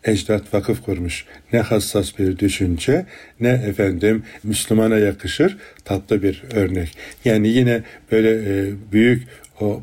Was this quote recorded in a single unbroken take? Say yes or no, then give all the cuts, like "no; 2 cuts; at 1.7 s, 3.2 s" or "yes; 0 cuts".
yes; 0 cuts